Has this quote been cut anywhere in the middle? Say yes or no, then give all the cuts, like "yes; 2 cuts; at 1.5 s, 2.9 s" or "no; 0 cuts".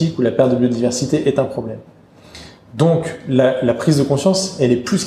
no; 0 cuts